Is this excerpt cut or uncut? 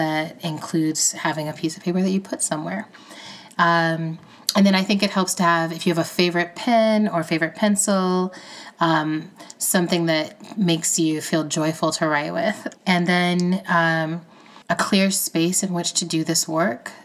cut